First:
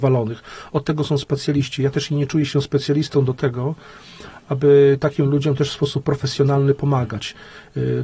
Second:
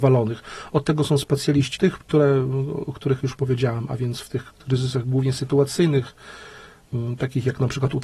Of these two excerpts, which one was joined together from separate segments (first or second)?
second